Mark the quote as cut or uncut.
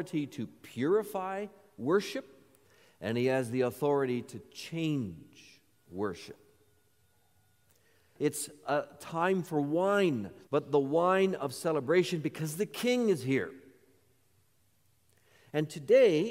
cut